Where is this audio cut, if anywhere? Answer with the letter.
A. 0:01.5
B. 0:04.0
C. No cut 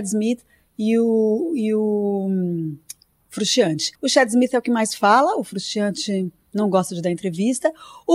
B